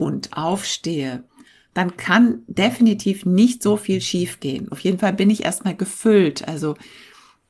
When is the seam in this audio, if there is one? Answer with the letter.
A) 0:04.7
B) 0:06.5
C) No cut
A